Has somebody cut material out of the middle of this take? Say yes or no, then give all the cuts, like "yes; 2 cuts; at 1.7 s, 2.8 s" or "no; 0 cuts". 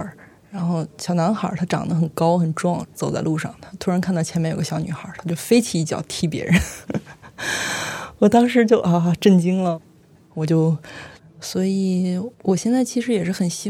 yes; 2 cuts; at 11.2 s, 12.3 s